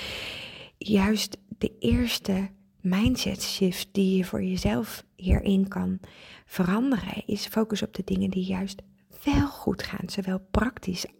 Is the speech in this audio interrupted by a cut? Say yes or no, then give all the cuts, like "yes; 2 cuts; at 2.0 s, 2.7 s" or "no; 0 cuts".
no; 0 cuts